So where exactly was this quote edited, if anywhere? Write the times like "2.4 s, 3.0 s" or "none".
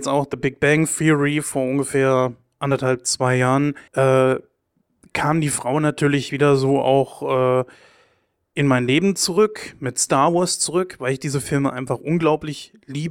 3.9 s